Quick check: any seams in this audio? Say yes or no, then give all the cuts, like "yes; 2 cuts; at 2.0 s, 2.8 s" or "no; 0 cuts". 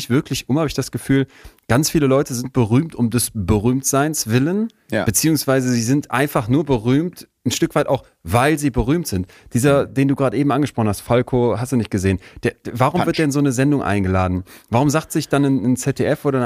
no; 0 cuts